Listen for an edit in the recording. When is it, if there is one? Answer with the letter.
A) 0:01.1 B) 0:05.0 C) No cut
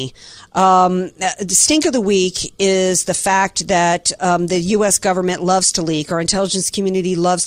C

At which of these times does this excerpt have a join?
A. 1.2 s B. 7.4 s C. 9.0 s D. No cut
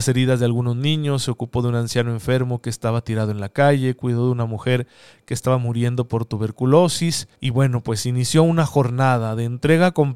B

